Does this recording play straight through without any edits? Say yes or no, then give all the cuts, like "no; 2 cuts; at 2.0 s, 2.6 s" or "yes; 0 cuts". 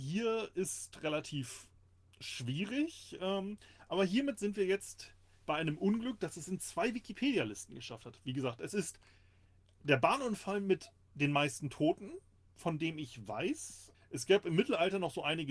no; 1 cut; at 13.9 s